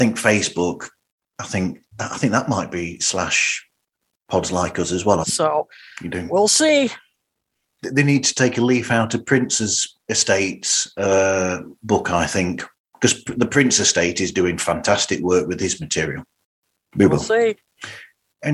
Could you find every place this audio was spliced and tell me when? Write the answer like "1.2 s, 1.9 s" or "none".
5.2 s, 12.7 s, 16.8 s